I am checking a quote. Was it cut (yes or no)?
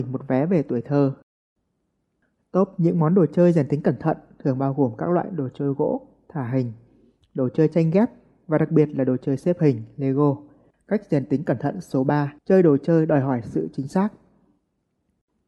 yes